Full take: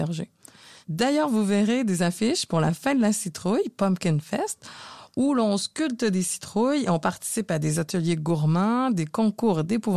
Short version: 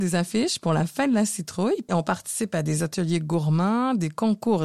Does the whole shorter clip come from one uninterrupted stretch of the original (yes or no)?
no